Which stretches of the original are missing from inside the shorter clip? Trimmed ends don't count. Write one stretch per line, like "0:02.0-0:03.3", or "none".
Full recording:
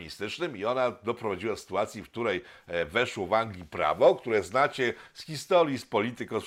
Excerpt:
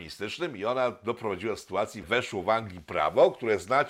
0:02.0-0:02.9